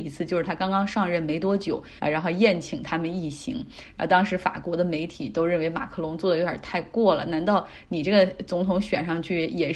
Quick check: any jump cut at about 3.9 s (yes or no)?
no